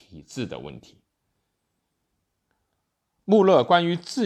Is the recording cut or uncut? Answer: cut